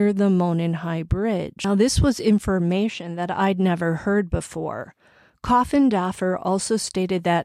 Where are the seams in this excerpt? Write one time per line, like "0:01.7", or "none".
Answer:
none